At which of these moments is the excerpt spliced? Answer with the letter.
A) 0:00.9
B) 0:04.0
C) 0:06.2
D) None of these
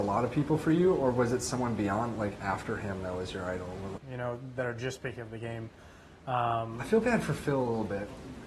B